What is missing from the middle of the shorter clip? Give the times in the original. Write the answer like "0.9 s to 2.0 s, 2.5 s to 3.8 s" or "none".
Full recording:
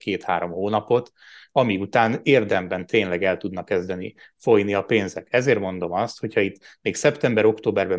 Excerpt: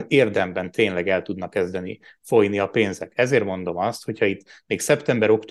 none